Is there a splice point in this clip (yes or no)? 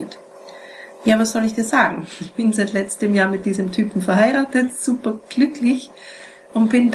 no